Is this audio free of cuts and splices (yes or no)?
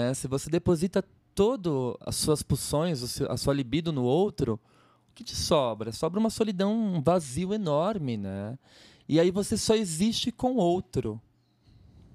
no